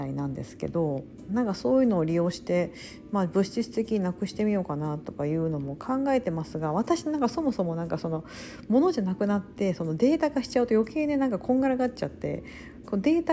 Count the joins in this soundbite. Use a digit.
1